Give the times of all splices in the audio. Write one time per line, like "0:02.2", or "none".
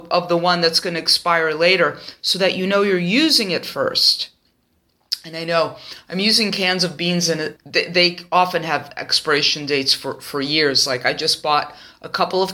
0:07.6